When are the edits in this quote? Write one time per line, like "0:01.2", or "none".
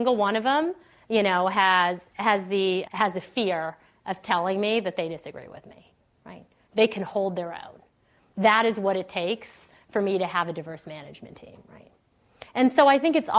0:02.9